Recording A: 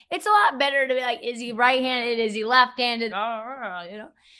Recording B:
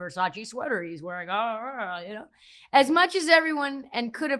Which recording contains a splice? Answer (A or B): A